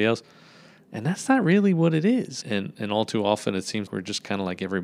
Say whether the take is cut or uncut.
cut